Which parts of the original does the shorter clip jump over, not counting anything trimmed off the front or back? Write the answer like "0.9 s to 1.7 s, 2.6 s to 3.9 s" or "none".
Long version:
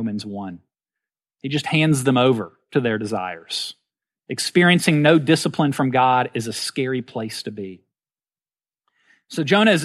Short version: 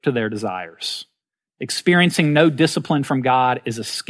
none